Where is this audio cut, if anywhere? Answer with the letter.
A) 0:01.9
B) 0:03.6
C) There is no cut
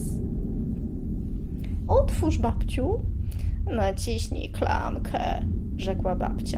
A